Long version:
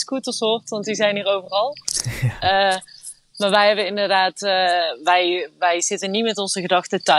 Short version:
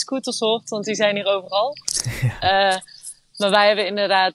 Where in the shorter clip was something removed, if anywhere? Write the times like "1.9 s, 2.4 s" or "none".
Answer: none